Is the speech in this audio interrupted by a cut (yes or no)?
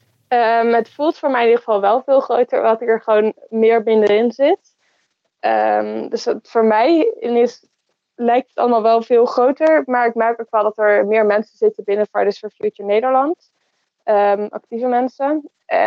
no